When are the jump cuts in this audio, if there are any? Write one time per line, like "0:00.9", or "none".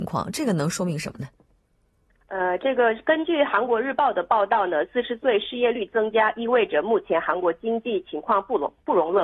none